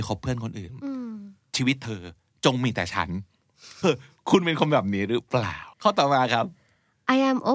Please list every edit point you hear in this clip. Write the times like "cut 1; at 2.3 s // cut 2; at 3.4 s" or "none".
cut 1; at 3.8 s // cut 2; at 5.7 s